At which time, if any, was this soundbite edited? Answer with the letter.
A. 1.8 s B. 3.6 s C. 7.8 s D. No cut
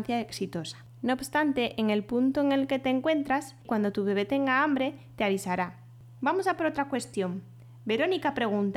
D